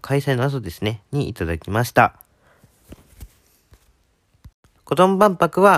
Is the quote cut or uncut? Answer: cut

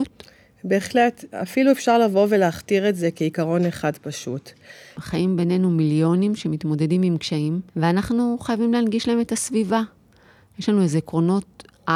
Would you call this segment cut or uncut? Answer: cut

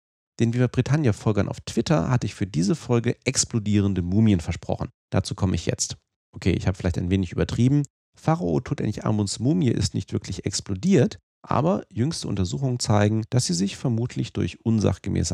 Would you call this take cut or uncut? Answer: uncut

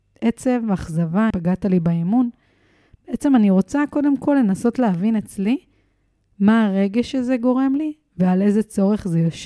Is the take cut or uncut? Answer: cut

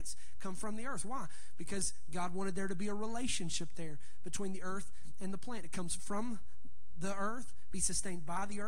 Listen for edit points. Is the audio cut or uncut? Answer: uncut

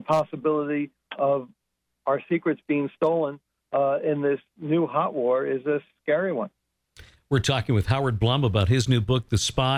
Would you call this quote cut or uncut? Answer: uncut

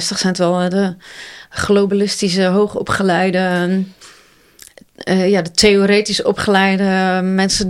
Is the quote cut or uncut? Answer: uncut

